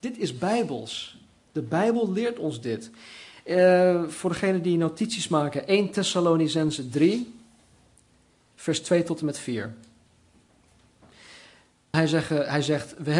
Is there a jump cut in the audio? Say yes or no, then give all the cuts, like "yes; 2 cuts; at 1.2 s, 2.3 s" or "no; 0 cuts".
yes; 1 cut; at 11.9 s